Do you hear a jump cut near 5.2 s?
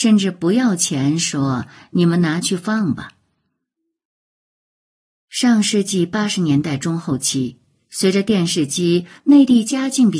no; 1 cut; at 9.2 s

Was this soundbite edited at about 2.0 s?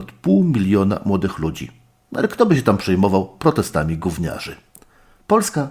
no; 0 cuts

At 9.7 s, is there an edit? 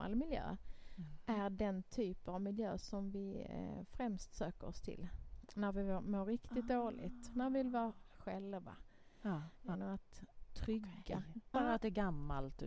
yes; 3 cuts; at 8.1 s, 9.7 s, 11.5 s

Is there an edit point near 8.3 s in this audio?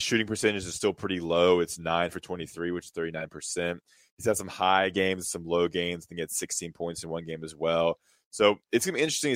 no; 0 cuts

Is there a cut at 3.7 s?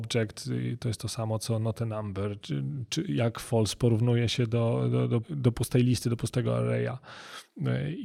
no; 2 cuts; at 2.4 s, 5.2 s

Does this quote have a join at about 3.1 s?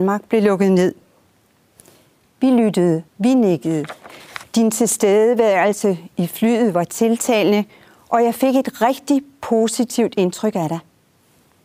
yes; 2 cuts; at 3.1 s, 4.4 s

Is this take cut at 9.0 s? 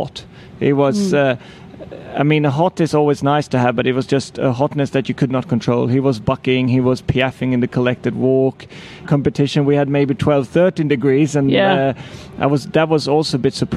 yes; 1 cut; at 9.0 s

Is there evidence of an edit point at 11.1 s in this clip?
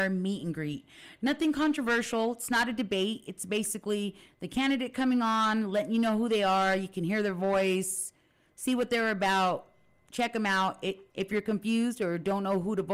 yes; 1 cut; at 11.1 s

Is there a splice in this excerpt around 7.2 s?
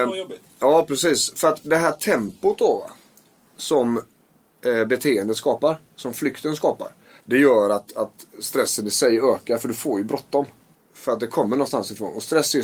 yes; 2 cuts; at 7.2 s, 10.7 s

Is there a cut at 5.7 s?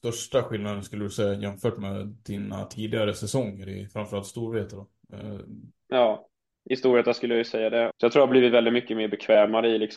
yes; 2 cuts; at 5.7 s, 7.9 s

